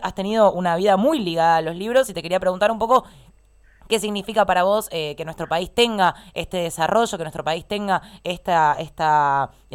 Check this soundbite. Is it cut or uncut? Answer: uncut